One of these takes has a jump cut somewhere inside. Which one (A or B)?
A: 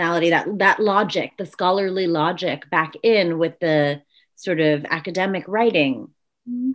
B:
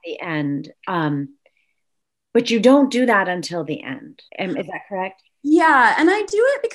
B